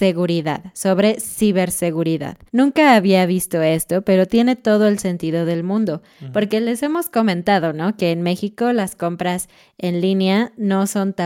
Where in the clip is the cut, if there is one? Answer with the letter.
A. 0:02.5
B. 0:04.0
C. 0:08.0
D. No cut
A